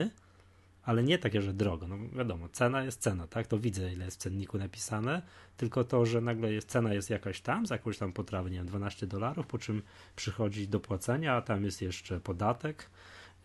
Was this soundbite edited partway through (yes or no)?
no